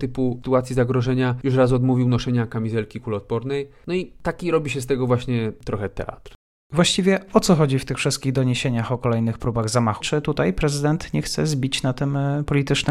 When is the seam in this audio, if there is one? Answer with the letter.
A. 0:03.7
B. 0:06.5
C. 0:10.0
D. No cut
C